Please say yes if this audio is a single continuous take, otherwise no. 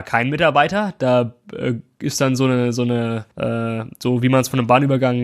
no